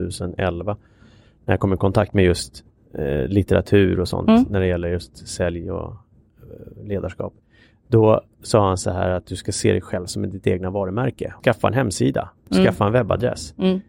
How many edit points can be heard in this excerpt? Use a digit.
1